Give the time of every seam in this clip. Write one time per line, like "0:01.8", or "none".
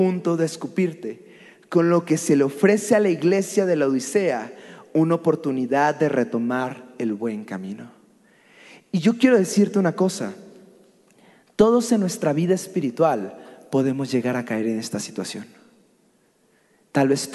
none

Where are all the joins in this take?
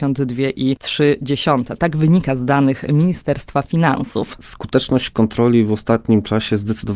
0:04.4

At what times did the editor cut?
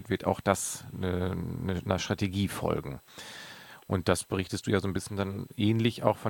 none

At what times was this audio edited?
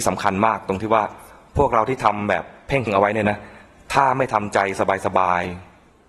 0:02.9

